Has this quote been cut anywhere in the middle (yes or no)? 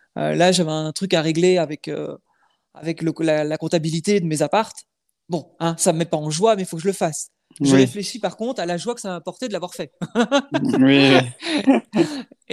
no